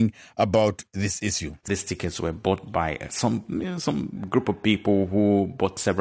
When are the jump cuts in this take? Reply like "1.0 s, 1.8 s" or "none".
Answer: 1.6 s